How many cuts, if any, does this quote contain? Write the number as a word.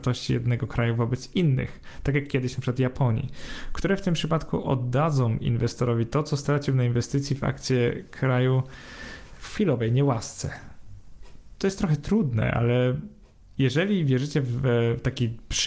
zero